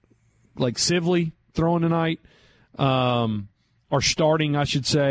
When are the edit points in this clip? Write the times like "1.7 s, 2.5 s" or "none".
none